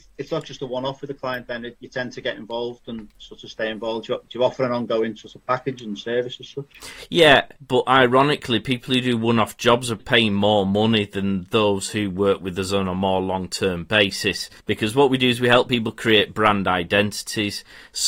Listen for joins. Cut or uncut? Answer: cut